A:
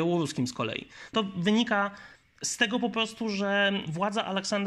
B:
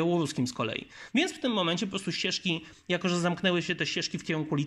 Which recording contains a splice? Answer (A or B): A